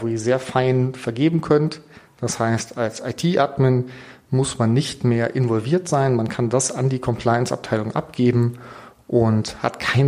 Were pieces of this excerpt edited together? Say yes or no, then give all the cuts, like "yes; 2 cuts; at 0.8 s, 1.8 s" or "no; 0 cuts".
no; 0 cuts